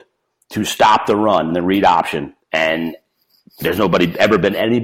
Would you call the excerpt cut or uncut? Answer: cut